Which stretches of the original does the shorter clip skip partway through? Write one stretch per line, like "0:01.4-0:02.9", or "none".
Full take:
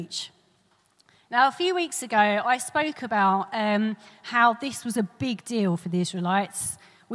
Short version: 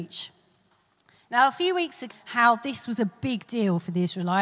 0:02.1-0:04.1